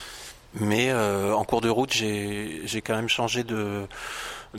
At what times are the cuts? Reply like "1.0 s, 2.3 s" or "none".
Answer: none